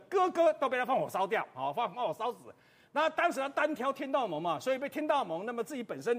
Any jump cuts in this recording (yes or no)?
no